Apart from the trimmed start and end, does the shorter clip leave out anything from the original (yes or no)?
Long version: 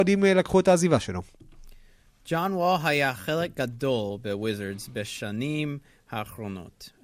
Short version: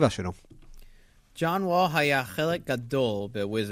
no